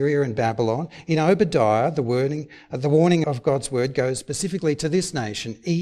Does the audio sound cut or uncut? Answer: cut